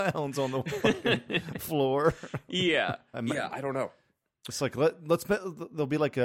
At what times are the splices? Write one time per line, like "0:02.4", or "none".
0:03.1